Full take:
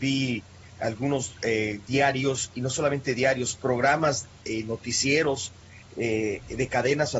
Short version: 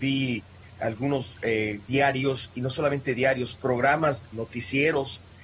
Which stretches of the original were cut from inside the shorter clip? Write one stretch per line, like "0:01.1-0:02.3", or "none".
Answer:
0:04.3-0:04.6